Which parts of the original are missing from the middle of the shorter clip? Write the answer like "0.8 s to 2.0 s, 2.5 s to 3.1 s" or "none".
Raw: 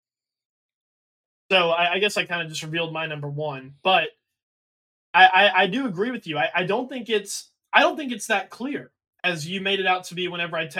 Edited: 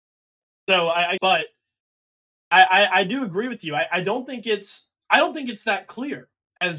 2.0 s to 3.8 s